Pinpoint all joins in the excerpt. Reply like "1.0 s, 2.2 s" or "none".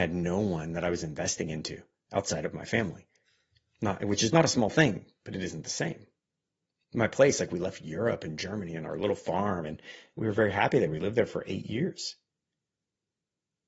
none